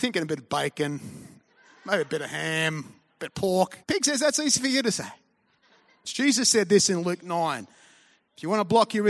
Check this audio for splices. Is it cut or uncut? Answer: cut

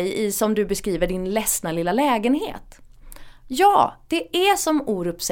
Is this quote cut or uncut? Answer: uncut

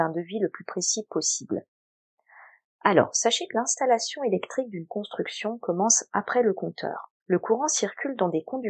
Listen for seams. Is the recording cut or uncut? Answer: cut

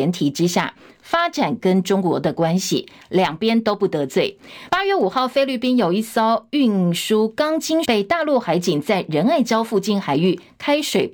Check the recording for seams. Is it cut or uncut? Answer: cut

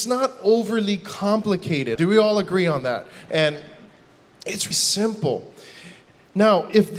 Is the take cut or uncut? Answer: cut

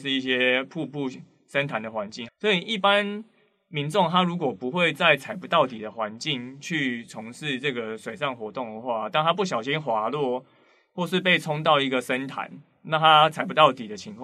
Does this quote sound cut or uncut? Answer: cut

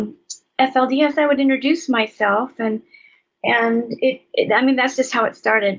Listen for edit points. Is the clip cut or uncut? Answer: uncut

